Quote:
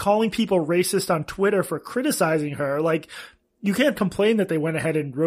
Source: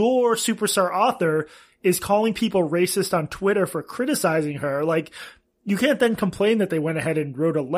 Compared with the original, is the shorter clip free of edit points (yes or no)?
no